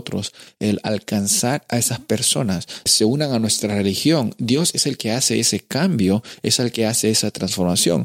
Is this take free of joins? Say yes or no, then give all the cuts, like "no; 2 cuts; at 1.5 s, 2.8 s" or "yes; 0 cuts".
no; 1 cut; at 2.9 s